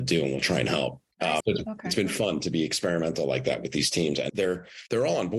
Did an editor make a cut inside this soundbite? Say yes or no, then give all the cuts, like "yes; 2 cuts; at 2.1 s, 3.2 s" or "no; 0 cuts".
yes; 2 cuts; at 1.4 s, 4.3 s